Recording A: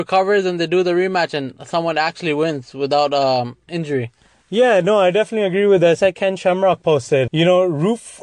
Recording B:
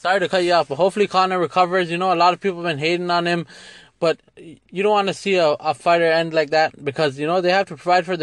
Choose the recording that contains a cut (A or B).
A